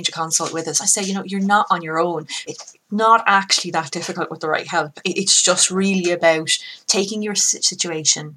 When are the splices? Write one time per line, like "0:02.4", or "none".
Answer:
0:02.5